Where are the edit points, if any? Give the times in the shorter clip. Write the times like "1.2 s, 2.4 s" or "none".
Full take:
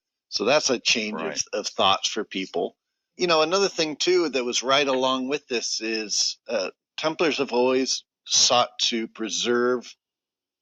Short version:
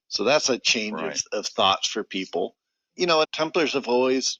3.2 s